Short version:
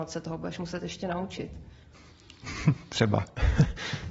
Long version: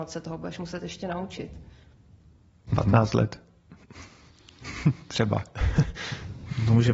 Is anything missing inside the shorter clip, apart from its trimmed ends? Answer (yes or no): yes